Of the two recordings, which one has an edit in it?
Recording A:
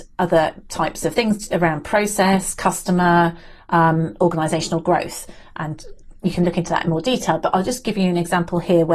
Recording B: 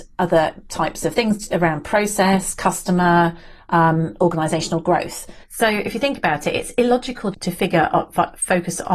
B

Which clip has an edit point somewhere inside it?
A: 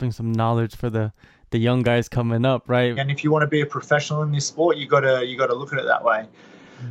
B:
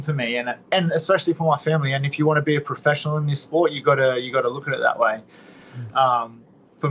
A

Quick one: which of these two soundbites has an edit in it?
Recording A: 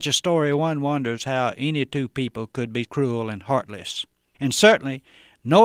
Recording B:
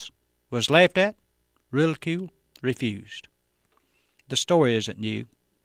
A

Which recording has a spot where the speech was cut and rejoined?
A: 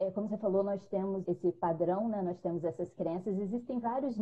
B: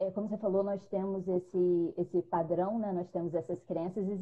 A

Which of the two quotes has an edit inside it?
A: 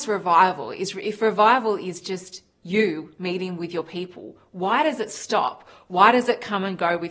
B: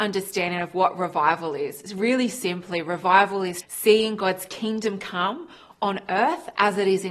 B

